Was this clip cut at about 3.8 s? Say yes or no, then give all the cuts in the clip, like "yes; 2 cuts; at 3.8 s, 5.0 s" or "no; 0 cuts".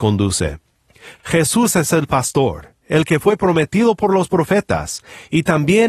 no; 1 cut; at 1.2 s